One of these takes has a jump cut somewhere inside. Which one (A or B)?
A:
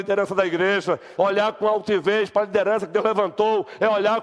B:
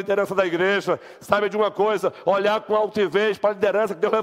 A